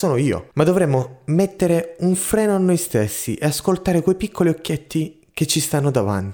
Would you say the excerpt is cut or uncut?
uncut